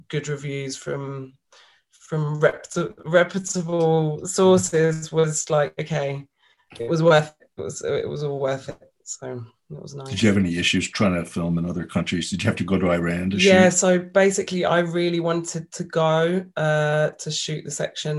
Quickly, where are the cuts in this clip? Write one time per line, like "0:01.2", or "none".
none

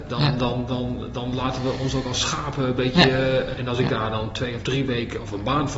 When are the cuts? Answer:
0:03.5

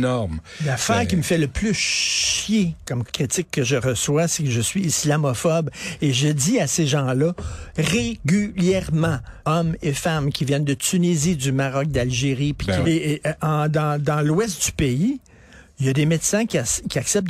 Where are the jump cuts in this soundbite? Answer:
0:09.4
0:12.8

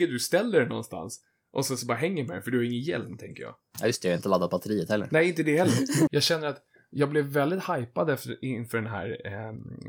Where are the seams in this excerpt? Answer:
0:06.1

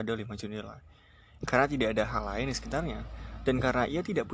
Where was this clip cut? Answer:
0:01.4

